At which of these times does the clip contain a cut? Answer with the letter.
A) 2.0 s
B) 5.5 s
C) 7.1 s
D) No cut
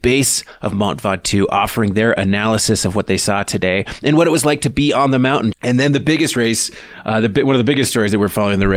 B